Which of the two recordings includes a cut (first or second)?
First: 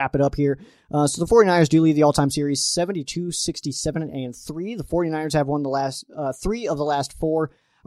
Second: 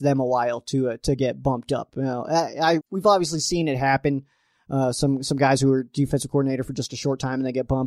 second